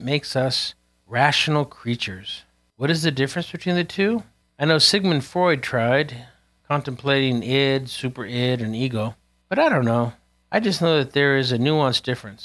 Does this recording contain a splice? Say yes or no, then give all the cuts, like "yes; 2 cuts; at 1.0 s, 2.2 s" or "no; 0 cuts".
yes; 1 cut; at 4.4 s